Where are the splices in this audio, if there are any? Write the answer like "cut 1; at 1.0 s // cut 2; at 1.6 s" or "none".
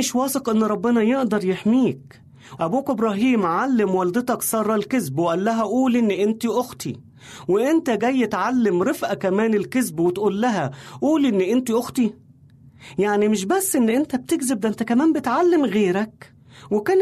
cut 1; at 2.6 s